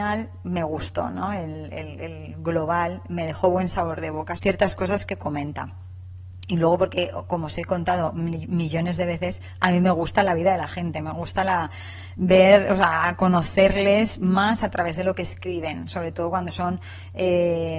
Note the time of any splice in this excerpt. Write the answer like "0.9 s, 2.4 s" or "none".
4.4 s